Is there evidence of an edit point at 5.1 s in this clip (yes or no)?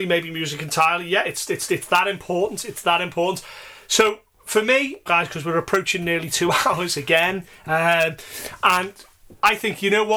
yes